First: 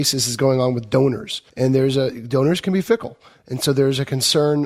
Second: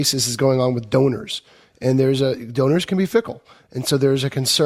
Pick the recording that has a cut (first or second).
first